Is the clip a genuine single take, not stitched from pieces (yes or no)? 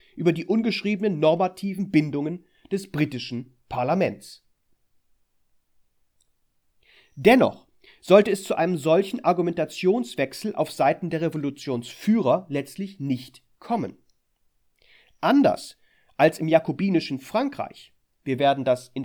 yes